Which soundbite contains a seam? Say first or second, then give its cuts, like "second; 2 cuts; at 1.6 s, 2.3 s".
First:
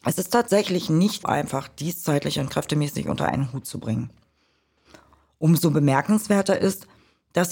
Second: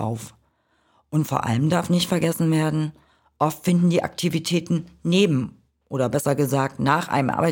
first; 1 cut; at 1.2 s